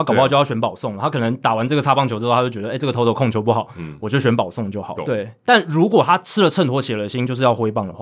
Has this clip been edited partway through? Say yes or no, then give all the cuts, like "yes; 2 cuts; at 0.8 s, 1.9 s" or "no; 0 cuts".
yes; 1 cut; at 5.0 s